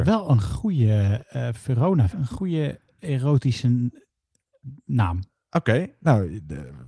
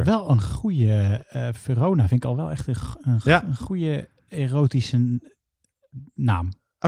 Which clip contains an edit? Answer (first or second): first